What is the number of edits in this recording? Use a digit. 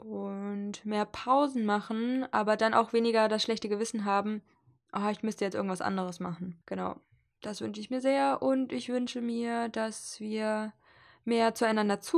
1